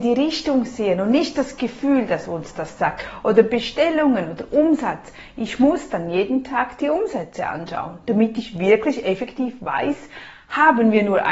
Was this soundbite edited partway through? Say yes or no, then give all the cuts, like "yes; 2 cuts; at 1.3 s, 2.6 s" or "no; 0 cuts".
no; 0 cuts